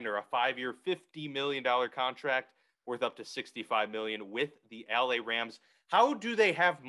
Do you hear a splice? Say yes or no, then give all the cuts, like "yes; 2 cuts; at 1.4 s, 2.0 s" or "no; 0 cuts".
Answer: no; 0 cuts